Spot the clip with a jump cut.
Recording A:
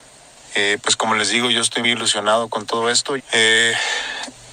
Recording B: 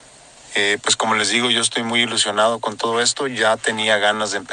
A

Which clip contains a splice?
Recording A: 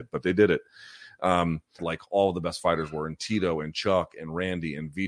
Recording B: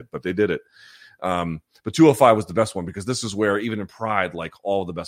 A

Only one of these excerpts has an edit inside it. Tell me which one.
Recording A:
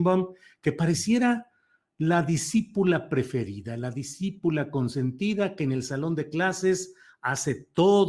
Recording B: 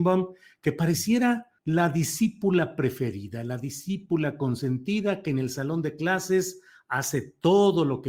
B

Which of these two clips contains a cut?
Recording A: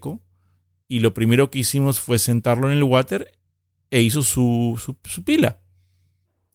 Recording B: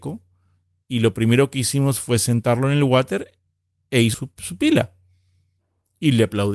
B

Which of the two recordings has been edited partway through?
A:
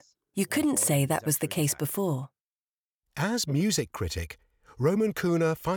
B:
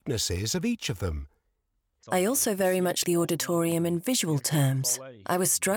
B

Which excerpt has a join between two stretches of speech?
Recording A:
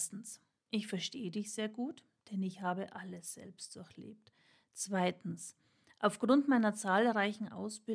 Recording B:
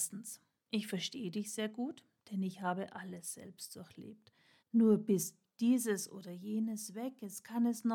B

